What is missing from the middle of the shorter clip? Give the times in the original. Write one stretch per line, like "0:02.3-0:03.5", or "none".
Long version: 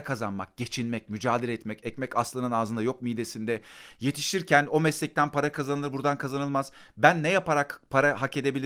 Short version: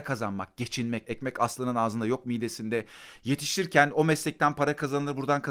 0:01.0-0:01.8